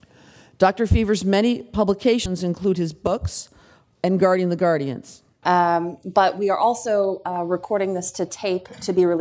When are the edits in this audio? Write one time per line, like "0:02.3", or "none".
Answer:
0:03.9
0:05.4